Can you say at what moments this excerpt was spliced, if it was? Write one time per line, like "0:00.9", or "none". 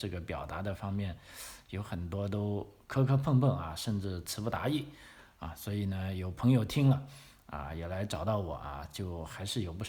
none